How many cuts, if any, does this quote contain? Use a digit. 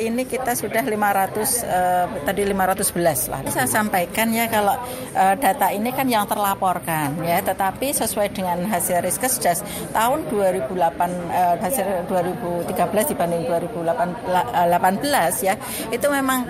2